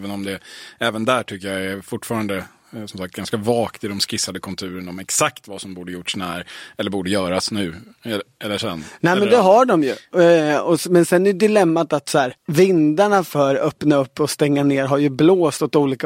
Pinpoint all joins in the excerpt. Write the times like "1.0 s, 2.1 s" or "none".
12.4 s